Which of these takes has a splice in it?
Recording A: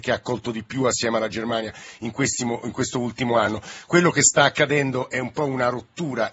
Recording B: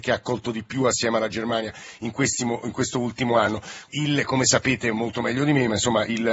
B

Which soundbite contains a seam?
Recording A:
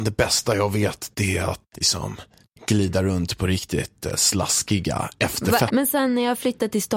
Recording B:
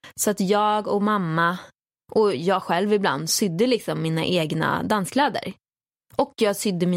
A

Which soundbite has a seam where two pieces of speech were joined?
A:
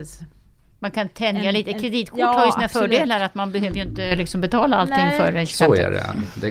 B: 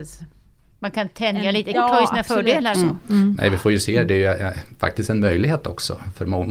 B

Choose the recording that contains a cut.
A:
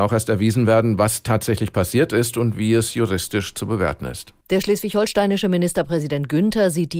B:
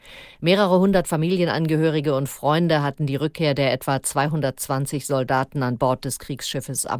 A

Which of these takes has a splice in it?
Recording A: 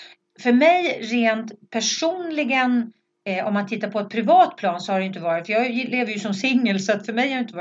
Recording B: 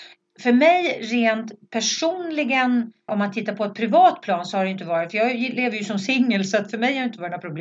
B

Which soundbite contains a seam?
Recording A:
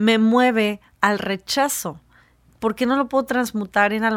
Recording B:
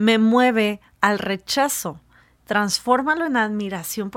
B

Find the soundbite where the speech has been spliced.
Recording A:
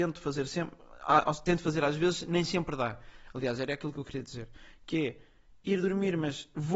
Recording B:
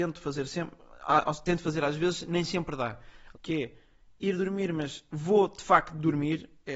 B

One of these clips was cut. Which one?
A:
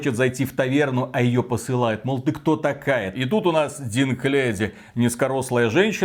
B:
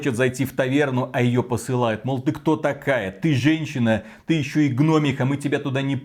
A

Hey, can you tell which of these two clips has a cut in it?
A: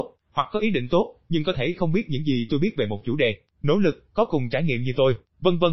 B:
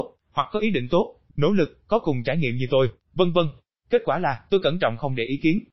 B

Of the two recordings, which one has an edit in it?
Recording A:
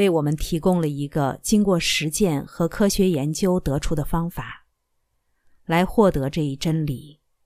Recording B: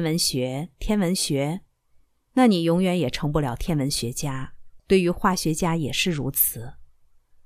B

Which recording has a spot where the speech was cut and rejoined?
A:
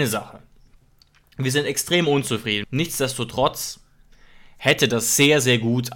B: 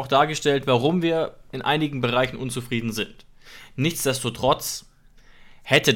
A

